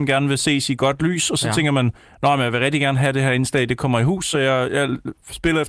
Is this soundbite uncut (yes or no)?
yes